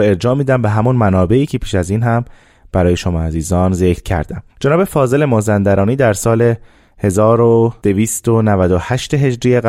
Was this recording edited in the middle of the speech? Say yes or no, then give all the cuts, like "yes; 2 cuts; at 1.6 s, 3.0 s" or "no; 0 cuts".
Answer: yes; 1 cut; at 4.5 s